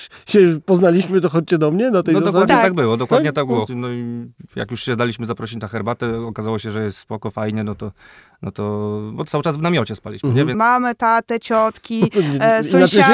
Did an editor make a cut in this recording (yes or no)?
yes